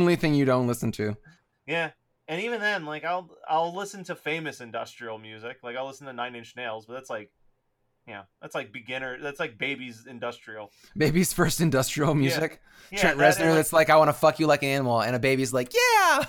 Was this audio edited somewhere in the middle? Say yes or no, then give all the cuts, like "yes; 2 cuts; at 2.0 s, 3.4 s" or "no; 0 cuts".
no; 0 cuts